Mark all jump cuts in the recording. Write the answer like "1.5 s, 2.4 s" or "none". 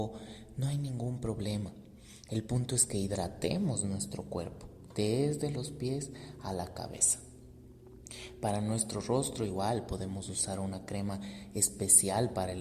none